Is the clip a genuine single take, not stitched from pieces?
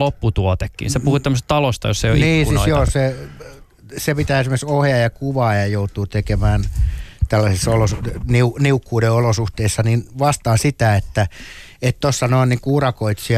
yes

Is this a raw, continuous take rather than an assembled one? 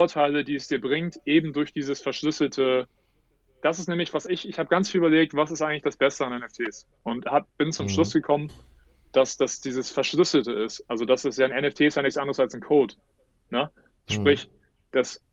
yes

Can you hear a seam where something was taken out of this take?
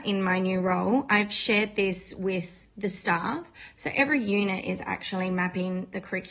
no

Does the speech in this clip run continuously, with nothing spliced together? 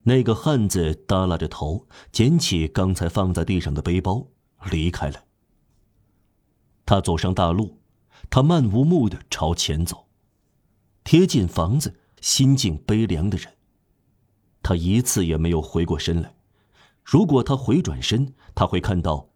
no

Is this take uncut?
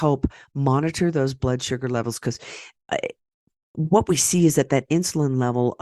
yes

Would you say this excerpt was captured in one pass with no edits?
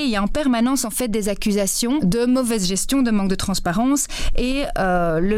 yes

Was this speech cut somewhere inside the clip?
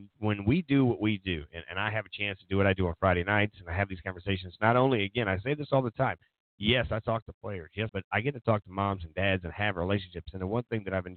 yes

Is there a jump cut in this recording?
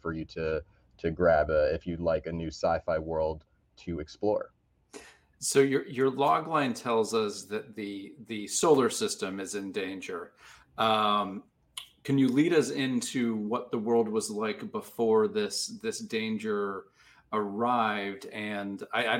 no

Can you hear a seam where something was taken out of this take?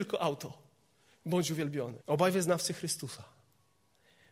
yes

